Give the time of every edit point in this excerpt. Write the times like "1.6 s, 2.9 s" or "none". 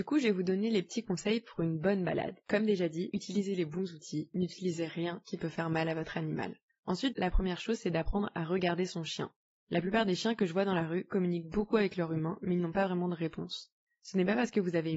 7.1 s